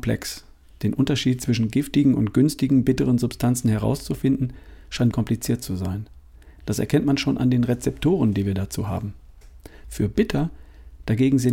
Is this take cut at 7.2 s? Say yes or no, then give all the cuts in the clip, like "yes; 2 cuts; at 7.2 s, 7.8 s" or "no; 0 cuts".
no; 2 cuts; at 5.1 s, 9.8 s